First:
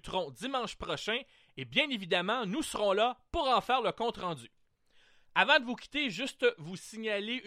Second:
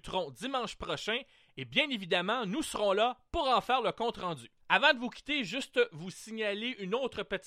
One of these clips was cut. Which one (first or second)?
second